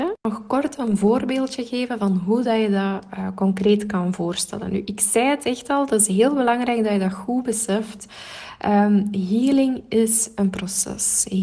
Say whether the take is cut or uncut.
uncut